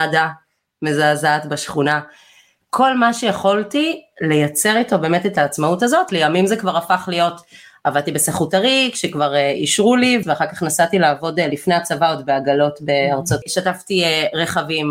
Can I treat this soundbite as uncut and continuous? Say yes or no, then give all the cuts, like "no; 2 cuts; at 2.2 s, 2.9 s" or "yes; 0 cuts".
no; 3 cuts; at 6.1 s, 10.2 s, 13.4 s